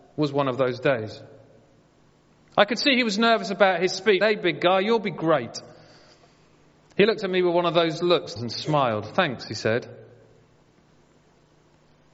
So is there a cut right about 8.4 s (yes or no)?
yes